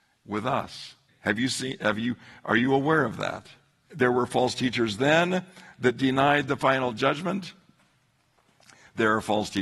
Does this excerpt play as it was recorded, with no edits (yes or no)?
no